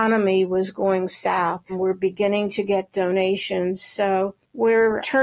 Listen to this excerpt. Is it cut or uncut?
cut